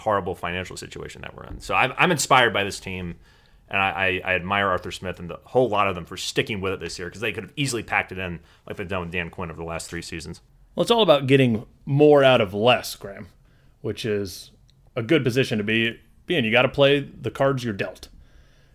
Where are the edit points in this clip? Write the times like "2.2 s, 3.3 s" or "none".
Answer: none